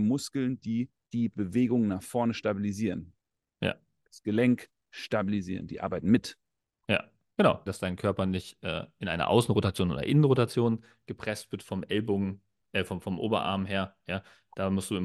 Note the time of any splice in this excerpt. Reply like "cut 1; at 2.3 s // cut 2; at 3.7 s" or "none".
cut 1; at 7.7 s